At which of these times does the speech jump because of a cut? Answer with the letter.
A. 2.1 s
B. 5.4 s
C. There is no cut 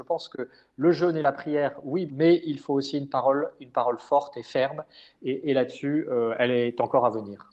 A